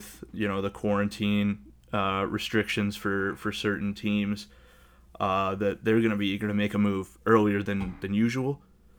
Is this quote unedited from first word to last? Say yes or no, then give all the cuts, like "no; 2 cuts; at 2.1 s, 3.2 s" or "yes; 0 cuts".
yes; 0 cuts